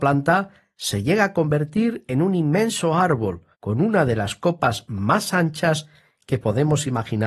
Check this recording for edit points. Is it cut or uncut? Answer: cut